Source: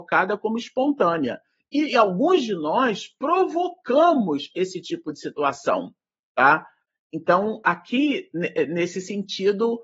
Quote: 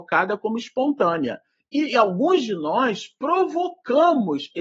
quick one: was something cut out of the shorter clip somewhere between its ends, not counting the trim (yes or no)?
no